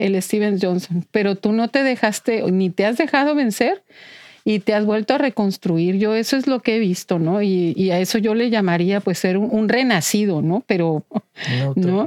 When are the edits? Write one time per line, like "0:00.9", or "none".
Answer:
0:09.5
0:11.1